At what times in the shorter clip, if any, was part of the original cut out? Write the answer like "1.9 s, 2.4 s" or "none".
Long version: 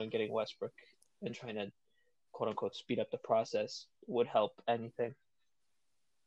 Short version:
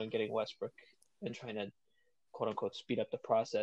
none